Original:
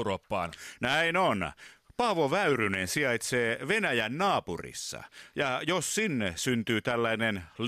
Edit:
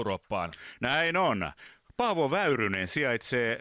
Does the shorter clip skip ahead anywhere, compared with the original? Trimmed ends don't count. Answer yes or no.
no